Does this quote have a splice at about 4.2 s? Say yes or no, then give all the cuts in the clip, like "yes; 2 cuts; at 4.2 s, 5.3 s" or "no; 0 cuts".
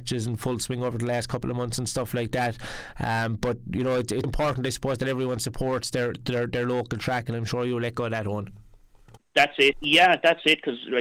yes; 2 cuts; at 4.2 s, 9.7 s